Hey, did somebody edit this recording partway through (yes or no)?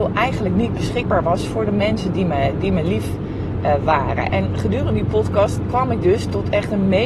yes